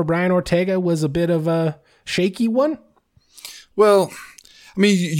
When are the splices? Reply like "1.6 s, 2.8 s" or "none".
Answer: none